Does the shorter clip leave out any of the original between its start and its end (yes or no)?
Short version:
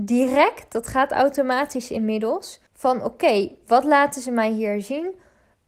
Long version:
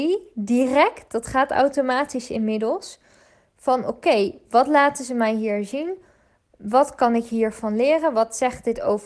yes